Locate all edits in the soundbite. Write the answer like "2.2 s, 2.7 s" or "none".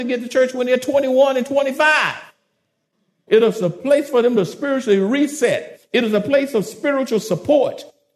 3.3 s